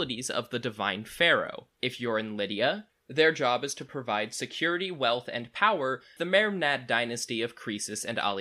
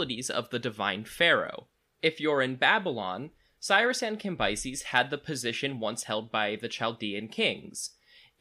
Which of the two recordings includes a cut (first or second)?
first